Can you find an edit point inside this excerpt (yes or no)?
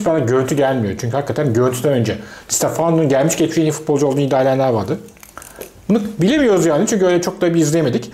no